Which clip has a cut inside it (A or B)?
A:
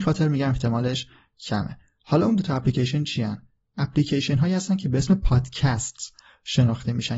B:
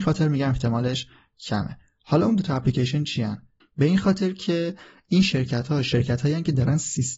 B